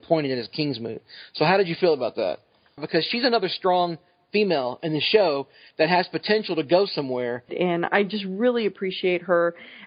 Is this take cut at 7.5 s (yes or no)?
yes